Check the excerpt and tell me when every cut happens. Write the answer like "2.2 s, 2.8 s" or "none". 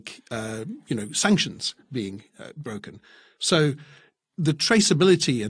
none